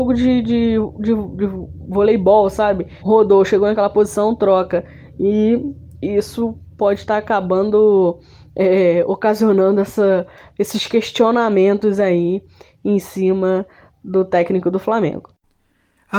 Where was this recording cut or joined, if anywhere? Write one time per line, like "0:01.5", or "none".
0:03.0